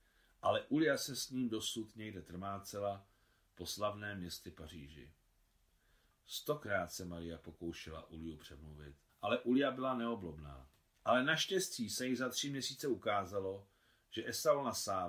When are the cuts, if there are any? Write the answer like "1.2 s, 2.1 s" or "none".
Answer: 6.2 s, 9.1 s, 10.9 s